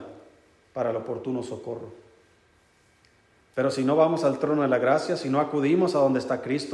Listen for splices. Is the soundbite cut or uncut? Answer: uncut